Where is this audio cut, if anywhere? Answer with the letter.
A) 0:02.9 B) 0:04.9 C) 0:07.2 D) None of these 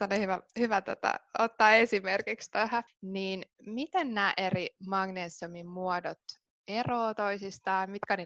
A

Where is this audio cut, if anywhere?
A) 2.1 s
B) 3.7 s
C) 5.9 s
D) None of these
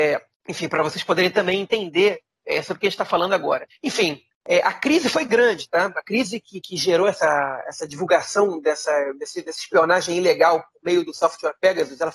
B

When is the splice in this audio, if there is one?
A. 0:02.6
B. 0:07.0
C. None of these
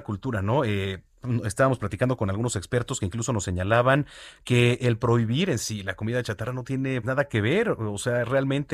B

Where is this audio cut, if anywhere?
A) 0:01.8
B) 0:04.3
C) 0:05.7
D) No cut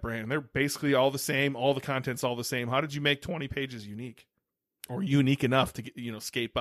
D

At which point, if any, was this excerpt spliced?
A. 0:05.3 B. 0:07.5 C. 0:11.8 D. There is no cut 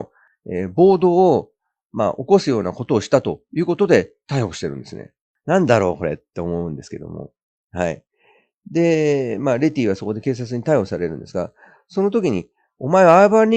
D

